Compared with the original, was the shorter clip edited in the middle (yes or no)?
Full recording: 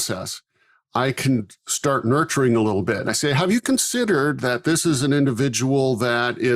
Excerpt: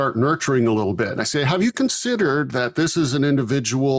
no